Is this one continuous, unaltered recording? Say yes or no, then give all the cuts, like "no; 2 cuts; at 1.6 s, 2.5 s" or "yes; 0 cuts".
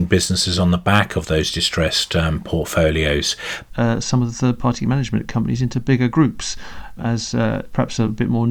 no; 2 cuts; at 3.7 s, 7.0 s